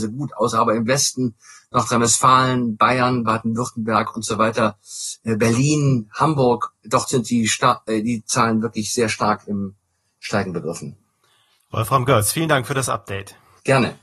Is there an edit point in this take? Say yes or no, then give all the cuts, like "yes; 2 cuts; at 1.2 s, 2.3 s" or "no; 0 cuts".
no; 0 cuts